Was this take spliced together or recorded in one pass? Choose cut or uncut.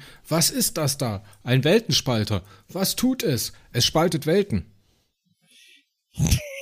uncut